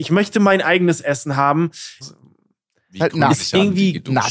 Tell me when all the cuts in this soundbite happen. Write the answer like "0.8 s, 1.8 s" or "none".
2.0 s